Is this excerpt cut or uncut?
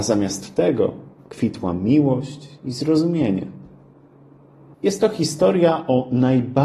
cut